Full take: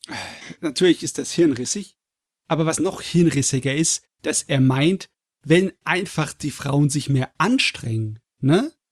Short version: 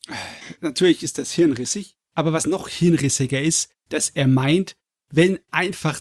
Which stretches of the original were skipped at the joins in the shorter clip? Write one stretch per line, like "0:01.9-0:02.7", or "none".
0:02.0-0:02.4